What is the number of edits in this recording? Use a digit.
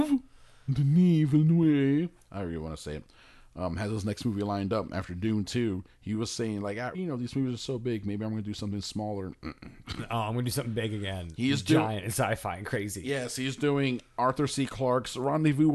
1